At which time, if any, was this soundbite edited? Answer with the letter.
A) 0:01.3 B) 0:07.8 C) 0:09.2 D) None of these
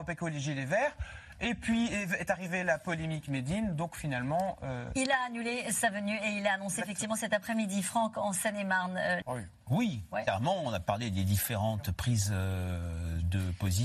C